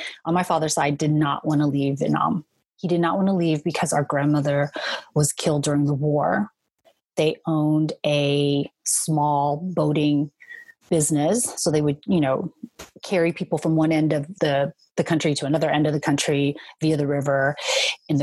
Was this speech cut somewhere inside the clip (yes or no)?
yes